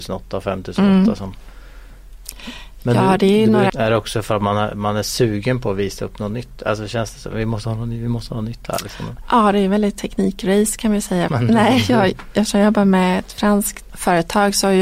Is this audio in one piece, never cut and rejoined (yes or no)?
no